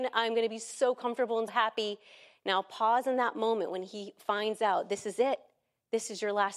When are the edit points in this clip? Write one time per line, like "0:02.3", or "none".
0:01.5